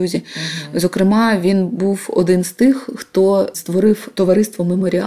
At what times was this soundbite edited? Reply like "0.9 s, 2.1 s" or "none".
none

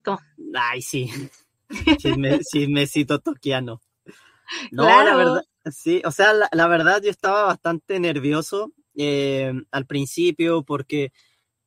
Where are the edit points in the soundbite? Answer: none

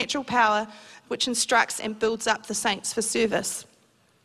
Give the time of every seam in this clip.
1.8 s

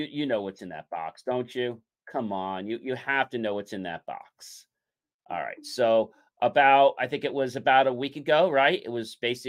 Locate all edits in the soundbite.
none

